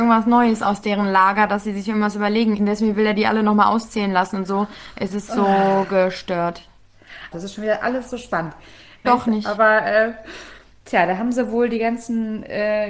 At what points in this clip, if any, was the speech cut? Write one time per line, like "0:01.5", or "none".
0:02.6
0:07.3
0:09.0